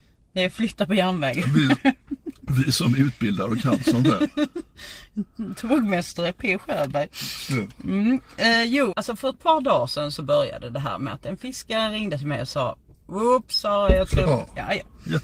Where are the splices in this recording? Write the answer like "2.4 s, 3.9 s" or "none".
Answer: 8.9 s, 14.3 s